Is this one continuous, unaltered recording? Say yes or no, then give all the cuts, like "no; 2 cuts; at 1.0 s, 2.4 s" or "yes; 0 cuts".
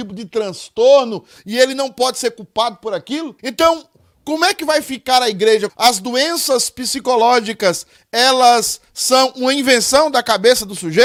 no; 2 cuts; at 3.4 s, 5.7 s